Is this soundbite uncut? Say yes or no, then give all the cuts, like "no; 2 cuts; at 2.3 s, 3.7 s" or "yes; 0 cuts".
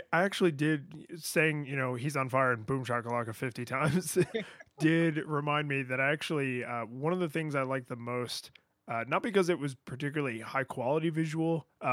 yes; 0 cuts